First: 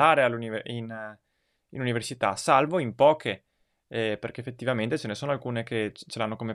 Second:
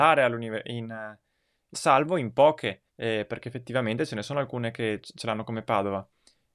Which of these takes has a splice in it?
second; 2 cuts; at 1.7 s, 2.9 s

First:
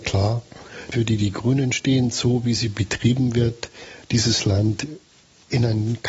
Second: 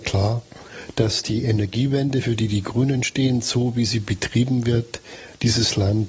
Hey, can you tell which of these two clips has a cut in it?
first; 1 cut; at 0.9 s

